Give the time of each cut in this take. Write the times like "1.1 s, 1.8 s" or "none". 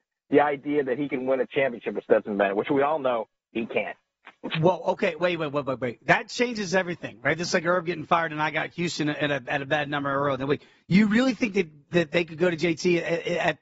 none